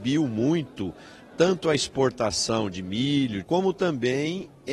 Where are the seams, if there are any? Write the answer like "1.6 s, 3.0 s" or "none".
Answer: 3.4 s